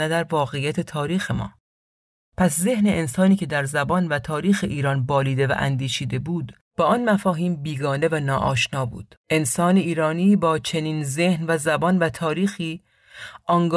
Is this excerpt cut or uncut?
cut